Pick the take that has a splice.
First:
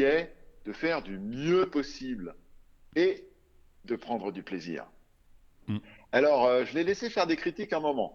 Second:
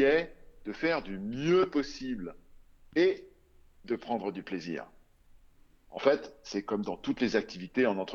first; 1 cut; at 5.6 s

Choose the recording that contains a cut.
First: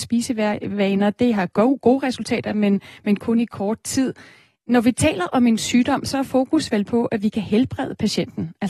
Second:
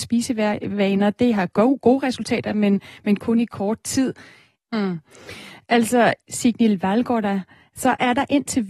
second; 2 cuts; at 4.6 s, 6.2 s

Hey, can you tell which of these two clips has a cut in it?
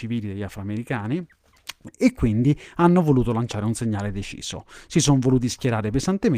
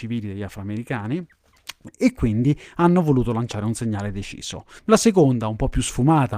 second; 1 cut; at 4.8 s

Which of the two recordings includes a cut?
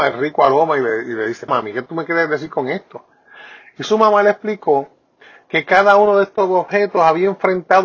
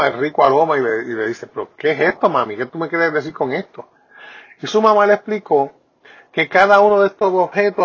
first; 1 cut; at 1.5 s

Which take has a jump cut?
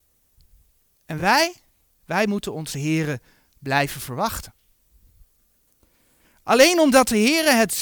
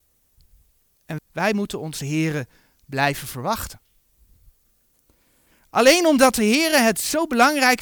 second; 1 cut; at 1.2 s

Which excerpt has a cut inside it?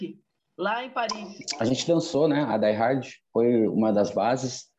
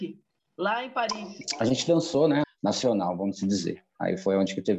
second; 1 cut; at 2.4 s

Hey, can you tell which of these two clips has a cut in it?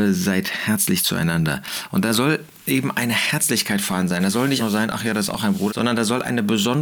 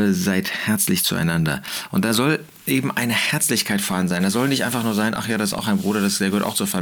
first; 2 cuts; at 4.6 s, 5.7 s

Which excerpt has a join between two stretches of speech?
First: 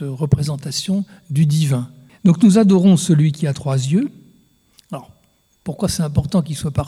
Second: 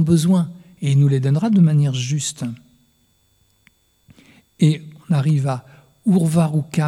first; 2 cuts; at 2.1 s, 4.7 s

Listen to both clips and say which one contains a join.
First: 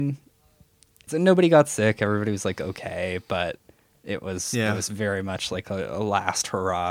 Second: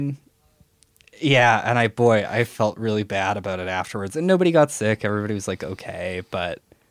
first; 1 cut; at 1.1 s

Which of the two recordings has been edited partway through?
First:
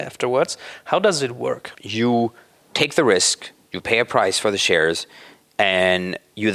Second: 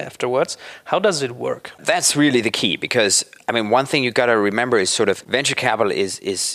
first; 1 cut; at 1.7 s

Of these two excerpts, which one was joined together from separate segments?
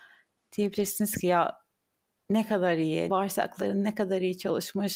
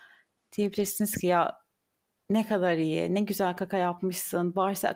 first; 1 cut; at 3.1 s

